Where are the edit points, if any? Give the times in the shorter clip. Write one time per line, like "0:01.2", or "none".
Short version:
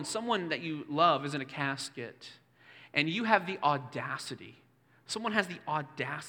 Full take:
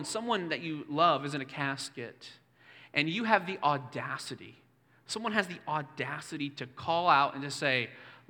none